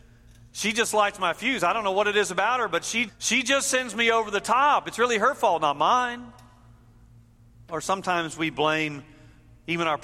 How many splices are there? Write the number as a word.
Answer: one